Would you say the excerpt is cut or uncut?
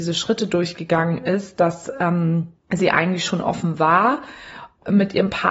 cut